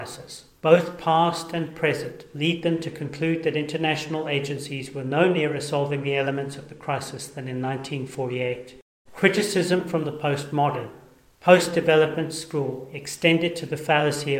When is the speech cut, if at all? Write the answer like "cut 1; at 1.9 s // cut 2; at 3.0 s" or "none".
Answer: cut 1; at 9.1 s